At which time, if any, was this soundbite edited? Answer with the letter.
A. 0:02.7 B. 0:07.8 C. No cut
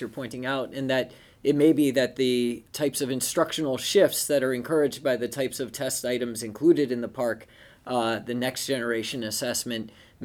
A